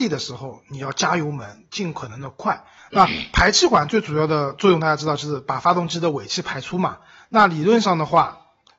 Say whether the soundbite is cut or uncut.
cut